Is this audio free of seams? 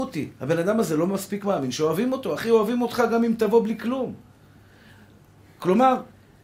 yes; 0 cuts

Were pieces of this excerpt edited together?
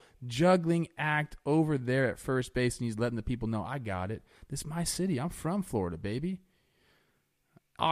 no; 0 cuts

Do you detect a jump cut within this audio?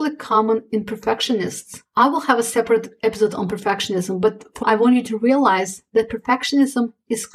yes; 1 cut; at 4.6 s

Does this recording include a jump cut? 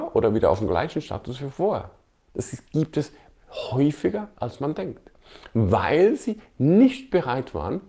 no; 0 cuts

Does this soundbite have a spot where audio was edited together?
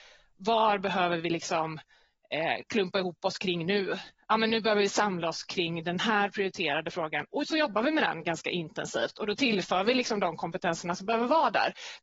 no; 0 cuts

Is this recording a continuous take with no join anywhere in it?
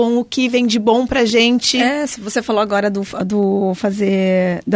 yes; 0 cuts

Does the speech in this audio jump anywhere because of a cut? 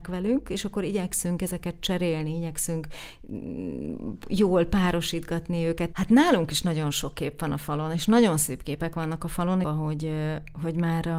yes; 2 cuts; at 5.9 s, 9.6 s

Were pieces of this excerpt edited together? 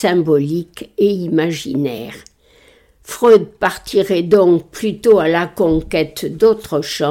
no; 0 cuts

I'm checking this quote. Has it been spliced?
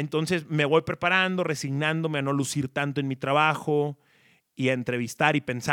no; 0 cuts

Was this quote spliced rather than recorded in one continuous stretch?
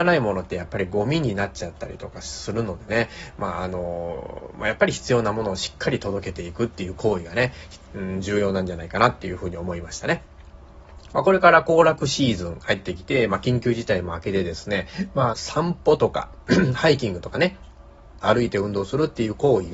yes; 3 cuts; at 11.1 s, 15.3 s, 18.2 s

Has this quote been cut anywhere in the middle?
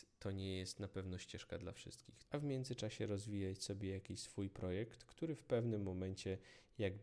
yes; 1 cut; at 2.2 s

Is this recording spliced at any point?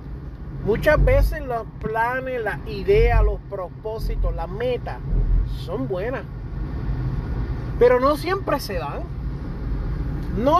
no; 0 cuts

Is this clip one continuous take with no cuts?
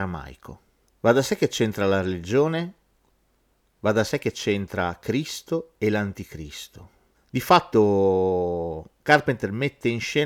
no; 1 cut; at 7.1 s

